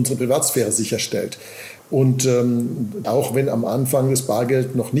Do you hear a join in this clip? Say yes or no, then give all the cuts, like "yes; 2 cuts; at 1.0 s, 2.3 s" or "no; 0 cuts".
yes; 2 cuts; at 1.8 s, 3.0 s